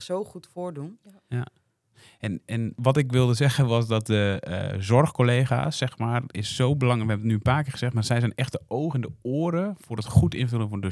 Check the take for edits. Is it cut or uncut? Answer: uncut